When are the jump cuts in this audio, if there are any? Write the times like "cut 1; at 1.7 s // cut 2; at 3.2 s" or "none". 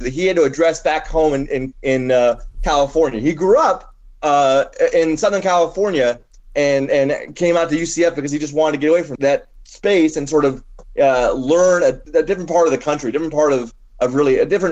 cut 1; at 9.2 s // cut 2; at 12.1 s

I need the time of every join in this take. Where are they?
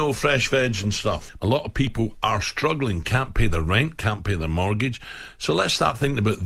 cut 1; at 1.4 s

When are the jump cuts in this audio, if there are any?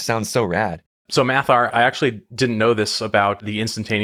cut 1; at 1.7 s

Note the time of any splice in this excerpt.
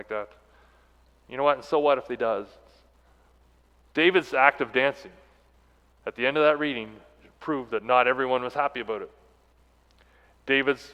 cut 1; at 3.8 s

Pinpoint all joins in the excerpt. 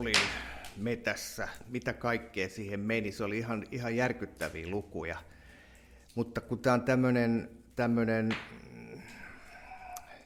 none

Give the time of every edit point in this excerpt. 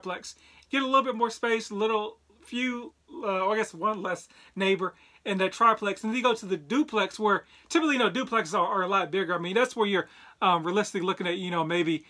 none

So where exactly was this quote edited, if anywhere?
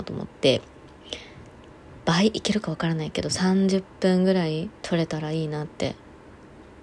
cut 1; at 4.8 s

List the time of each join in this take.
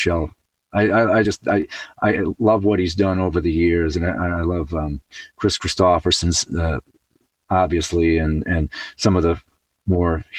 none

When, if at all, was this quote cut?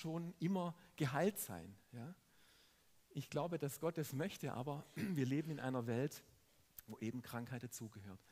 none

